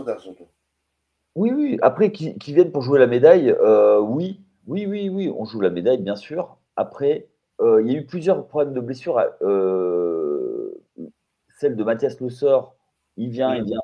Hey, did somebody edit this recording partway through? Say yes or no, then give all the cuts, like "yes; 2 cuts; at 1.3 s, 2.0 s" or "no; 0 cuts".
no; 0 cuts